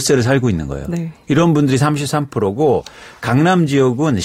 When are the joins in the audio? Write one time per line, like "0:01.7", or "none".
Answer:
none